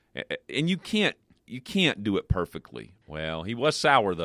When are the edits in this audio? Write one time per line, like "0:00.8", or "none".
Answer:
0:03.0